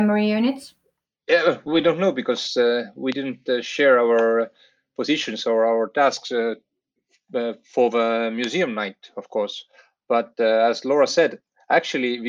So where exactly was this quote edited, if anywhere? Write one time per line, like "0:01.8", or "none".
none